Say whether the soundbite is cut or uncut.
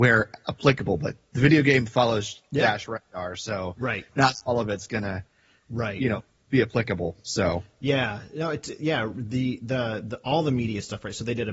uncut